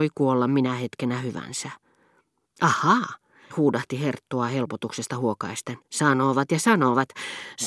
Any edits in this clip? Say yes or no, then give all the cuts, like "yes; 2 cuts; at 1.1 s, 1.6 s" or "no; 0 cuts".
yes; 2 cuts; at 3.5 s, 5.8 s